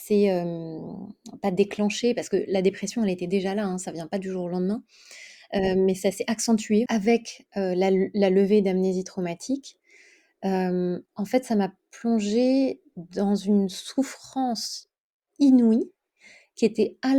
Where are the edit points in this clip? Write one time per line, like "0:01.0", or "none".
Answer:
0:06.9